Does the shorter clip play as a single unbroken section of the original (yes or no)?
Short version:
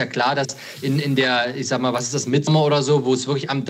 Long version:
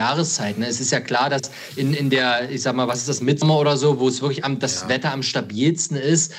yes